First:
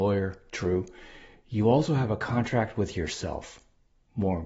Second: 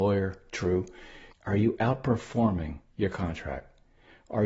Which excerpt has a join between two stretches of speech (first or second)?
second